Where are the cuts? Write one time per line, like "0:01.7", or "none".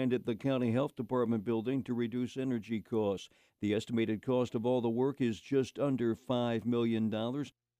0:03.5